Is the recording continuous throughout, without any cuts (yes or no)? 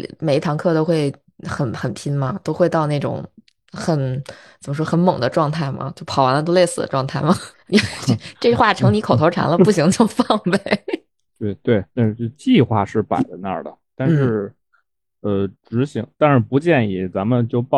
no